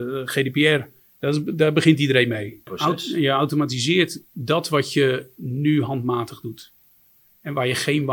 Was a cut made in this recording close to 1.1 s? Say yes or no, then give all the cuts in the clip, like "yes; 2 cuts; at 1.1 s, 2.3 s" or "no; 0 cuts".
no; 2 cuts; at 2.7 s, 4.3 s